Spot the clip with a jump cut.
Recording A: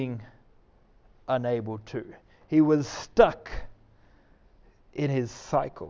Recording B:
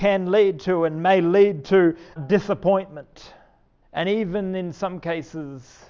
B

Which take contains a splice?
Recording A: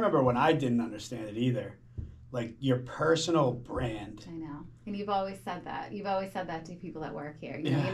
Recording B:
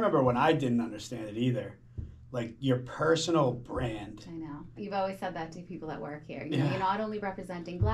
B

